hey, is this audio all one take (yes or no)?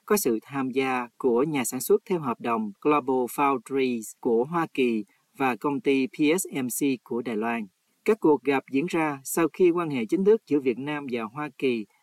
no